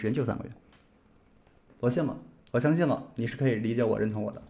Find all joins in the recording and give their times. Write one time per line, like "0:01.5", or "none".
none